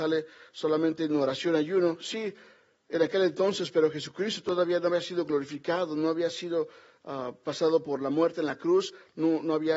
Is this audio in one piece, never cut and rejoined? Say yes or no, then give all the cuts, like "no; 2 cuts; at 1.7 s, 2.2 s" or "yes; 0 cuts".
yes; 0 cuts